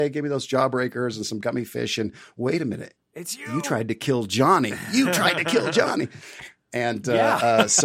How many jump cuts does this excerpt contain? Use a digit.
0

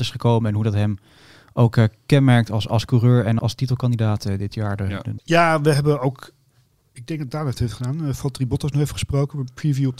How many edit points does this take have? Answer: 2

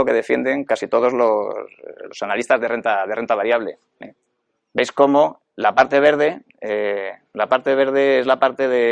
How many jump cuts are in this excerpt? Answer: 0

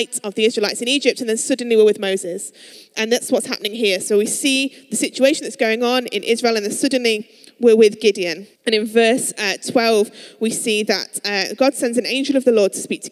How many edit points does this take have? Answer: 1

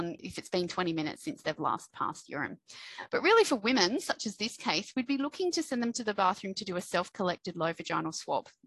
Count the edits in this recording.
0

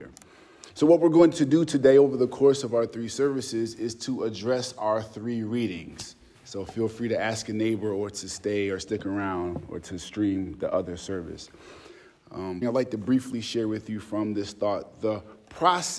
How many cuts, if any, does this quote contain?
2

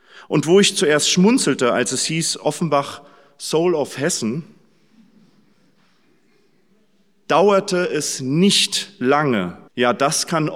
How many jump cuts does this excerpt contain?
1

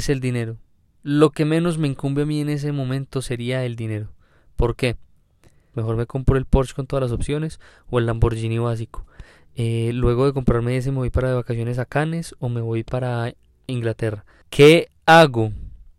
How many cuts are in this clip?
2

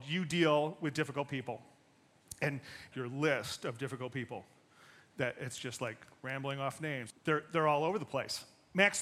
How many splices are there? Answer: 2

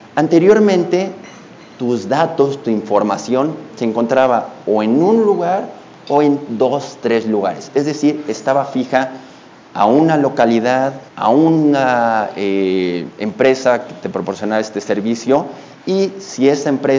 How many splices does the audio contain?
1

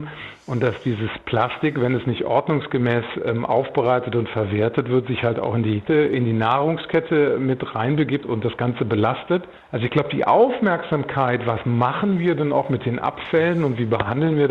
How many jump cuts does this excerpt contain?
2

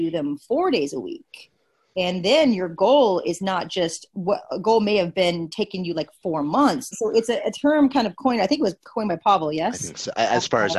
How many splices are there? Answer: 1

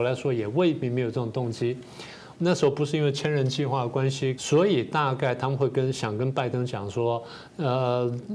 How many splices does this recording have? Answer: 2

